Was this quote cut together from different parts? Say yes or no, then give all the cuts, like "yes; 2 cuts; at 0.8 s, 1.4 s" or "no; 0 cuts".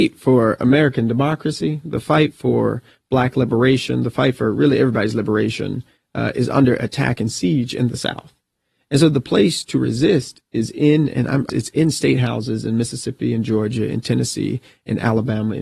yes; 1 cut; at 11.5 s